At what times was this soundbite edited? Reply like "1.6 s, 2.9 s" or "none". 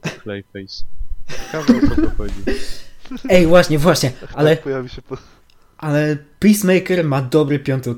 none